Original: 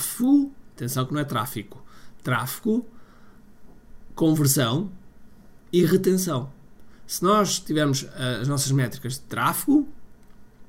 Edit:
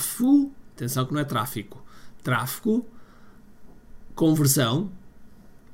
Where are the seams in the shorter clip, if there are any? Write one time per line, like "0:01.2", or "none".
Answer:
none